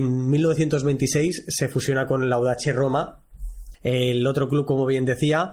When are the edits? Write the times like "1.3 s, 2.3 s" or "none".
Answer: 3.7 s